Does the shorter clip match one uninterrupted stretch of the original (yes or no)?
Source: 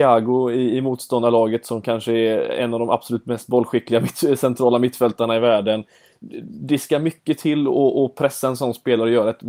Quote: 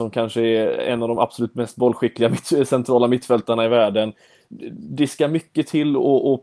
yes